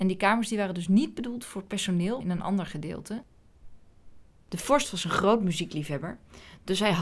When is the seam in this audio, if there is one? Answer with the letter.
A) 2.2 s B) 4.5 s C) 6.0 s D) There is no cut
A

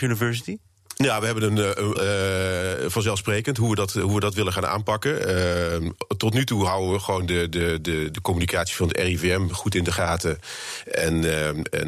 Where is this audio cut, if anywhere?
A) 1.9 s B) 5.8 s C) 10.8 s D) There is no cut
A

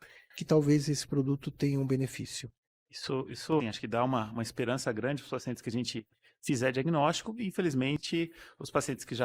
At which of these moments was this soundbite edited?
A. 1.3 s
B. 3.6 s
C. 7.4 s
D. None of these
B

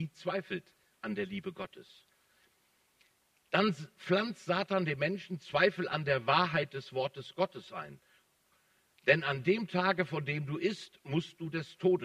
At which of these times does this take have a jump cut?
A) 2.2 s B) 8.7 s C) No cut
C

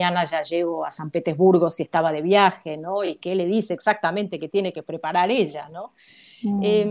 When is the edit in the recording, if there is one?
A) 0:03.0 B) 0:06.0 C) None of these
C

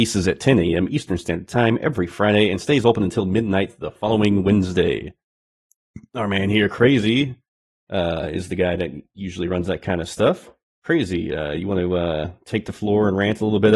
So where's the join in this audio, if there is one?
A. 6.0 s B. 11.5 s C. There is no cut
C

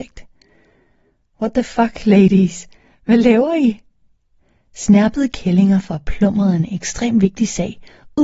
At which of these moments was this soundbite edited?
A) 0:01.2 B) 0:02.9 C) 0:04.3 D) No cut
D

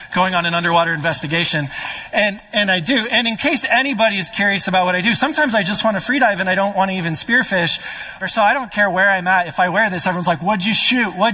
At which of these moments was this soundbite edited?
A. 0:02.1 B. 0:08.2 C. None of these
B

